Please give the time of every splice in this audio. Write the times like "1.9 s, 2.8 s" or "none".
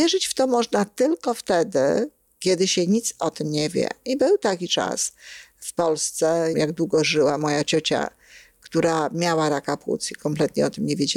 6.5 s